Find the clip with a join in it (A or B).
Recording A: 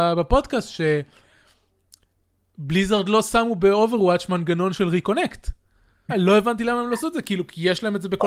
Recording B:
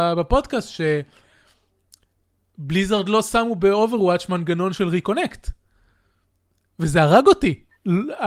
A